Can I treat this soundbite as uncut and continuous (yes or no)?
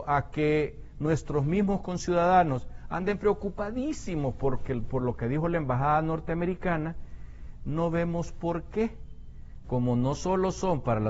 no